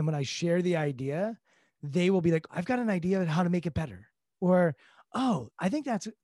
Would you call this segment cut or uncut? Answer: cut